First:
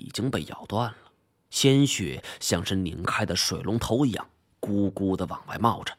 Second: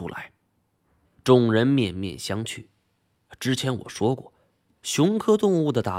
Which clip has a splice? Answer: second; 1 cut; at 1.0 s

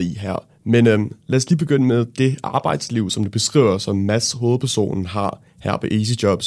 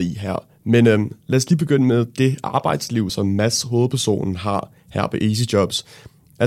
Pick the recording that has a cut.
second; 1 cut; at 3.1 s

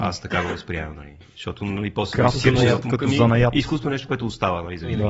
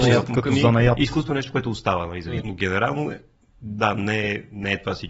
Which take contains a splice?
second; 1 cut; at 2.4 s

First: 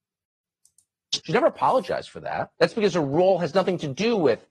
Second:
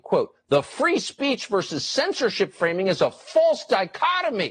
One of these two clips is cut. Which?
first; 2 cuts; at 1.2 s, 2.5 s

